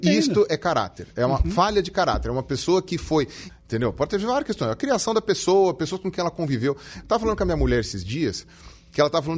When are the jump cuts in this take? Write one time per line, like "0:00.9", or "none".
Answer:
0:03.5